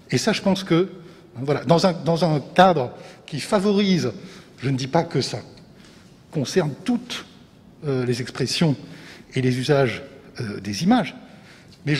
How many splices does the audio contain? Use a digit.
0